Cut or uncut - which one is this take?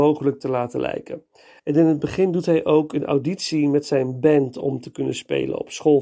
cut